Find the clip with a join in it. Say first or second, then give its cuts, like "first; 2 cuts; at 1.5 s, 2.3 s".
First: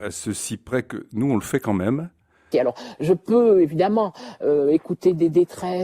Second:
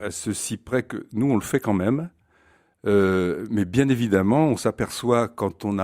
first; 1 cut; at 2.5 s